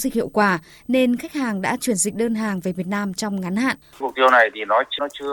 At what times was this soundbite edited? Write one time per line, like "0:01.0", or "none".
0:03.9